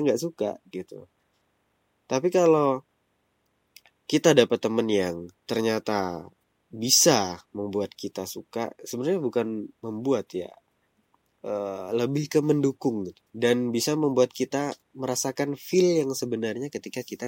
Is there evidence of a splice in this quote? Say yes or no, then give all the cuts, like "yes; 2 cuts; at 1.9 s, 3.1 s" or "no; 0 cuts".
yes; 2 cuts; at 5.4 s, 13.3 s